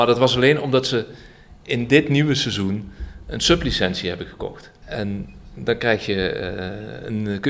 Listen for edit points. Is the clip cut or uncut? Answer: cut